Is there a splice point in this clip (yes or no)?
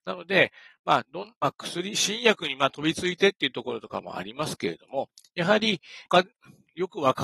no